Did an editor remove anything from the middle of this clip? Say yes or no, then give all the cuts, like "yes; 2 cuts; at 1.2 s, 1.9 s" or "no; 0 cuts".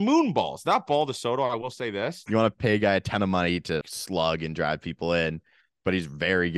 yes; 2 cuts; at 2.3 s, 3.8 s